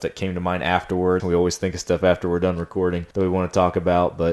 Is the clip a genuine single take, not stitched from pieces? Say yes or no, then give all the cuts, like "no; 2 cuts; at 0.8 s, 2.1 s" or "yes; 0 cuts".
no; 2 cuts; at 1.2 s, 3.1 s